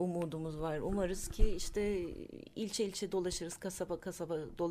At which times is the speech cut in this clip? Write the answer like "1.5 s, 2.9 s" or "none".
none